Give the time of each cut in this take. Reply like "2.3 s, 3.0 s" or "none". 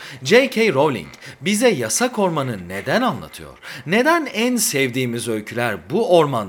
none